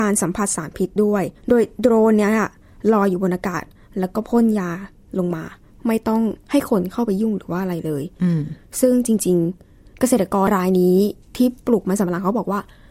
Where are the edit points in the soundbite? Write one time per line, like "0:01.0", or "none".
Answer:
0:01.4
0:10.5